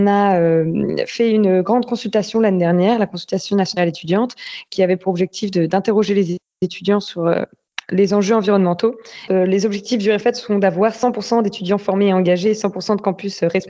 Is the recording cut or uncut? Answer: cut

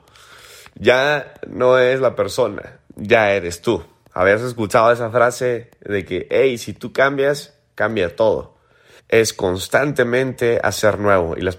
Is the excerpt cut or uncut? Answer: cut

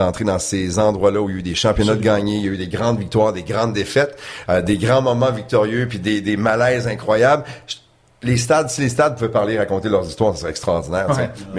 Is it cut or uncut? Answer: uncut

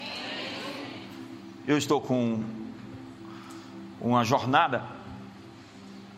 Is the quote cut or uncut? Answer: uncut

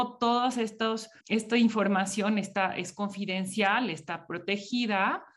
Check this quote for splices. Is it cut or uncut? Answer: cut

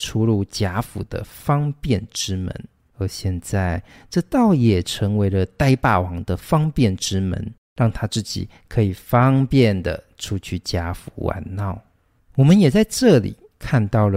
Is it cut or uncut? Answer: cut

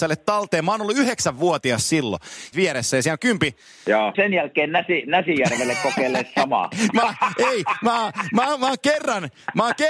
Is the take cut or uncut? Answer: cut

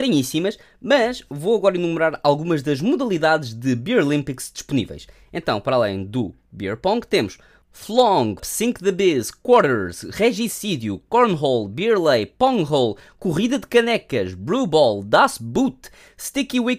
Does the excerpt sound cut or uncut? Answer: cut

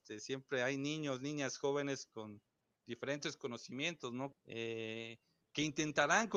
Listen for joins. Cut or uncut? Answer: cut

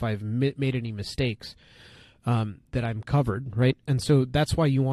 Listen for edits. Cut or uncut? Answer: uncut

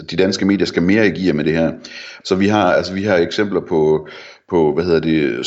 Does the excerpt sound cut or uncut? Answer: cut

